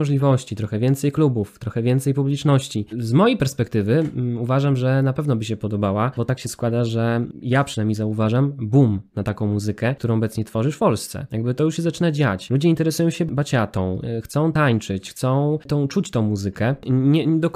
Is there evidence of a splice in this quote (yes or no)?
yes